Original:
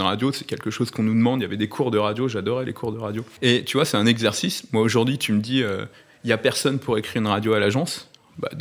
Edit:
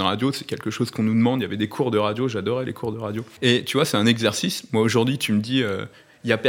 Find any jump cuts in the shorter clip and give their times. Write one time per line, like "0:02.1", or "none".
none